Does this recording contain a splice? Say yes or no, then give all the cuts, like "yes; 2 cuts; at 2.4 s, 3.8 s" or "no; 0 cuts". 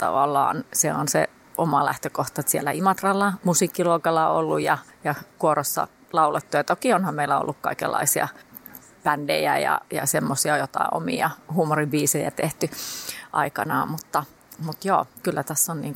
no; 0 cuts